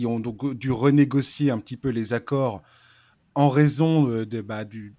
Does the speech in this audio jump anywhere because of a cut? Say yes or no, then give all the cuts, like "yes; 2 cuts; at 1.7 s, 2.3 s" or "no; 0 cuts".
no; 0 cuts